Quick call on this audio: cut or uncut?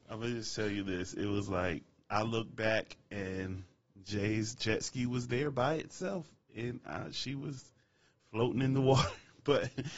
uncut